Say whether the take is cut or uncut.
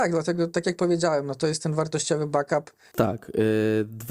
cut